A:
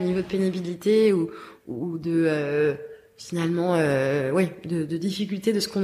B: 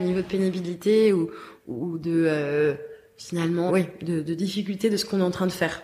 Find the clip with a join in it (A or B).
B